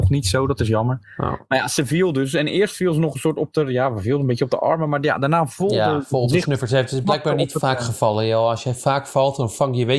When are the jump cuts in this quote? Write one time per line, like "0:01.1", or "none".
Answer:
none